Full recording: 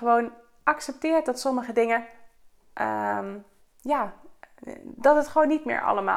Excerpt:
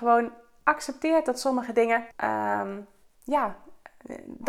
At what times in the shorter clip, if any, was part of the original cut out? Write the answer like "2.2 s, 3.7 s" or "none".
2.1 s